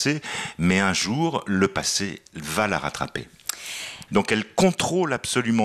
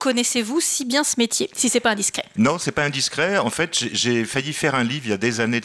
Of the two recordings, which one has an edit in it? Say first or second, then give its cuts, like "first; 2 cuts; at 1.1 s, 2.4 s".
first; 1 cut; at 4.1 s